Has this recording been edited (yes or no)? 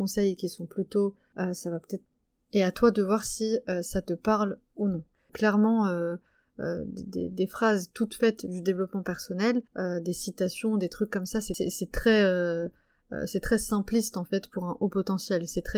yes